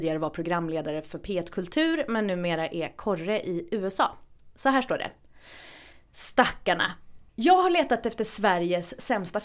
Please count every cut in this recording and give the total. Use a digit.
1